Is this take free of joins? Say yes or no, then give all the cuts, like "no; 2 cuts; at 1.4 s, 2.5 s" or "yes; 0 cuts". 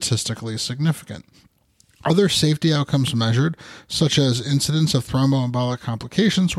yes; 0 cuts